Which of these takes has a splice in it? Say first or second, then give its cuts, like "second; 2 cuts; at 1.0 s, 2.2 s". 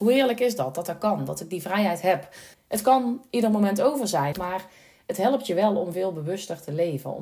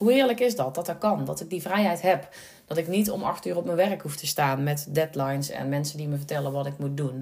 first; 2 cuts; at 2.5 s, 4.3 s